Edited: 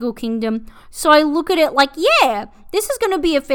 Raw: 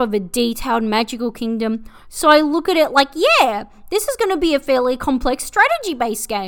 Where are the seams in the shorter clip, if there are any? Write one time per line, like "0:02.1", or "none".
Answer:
none